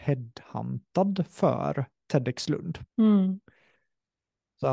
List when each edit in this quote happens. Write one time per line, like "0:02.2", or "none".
0:02.9